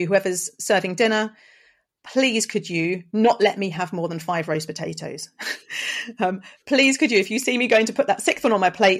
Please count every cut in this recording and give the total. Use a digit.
0